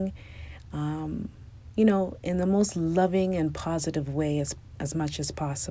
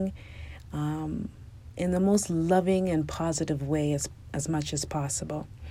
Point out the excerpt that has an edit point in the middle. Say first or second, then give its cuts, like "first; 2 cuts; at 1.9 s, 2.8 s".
second; 1 cut; at 1.7 s